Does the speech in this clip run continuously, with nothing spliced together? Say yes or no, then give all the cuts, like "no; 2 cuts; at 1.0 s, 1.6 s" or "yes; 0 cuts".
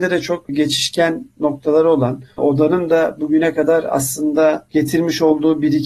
no; 1 cut; at 2.3 s